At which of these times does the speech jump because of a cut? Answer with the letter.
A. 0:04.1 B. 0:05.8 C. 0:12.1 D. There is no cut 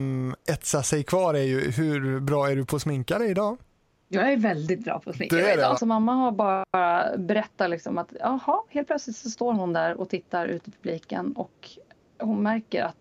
B